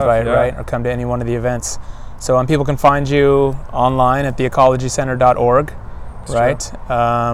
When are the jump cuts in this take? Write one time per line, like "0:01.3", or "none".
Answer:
none

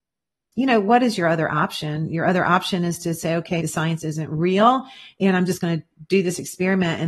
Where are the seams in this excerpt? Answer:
0:03.6

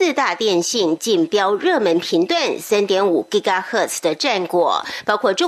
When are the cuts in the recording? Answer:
none

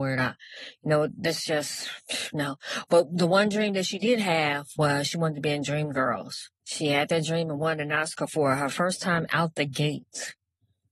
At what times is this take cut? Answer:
0:06.6

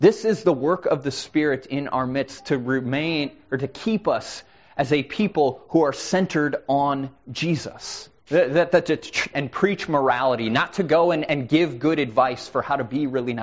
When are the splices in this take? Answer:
0:08.2
0:09.3

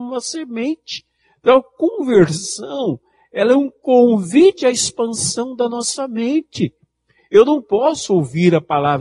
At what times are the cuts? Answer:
none

